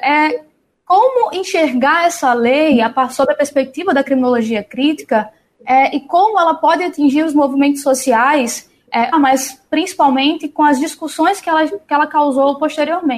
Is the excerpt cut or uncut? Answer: cut